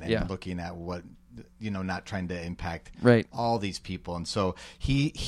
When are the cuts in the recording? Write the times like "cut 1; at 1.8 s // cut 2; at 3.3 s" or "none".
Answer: none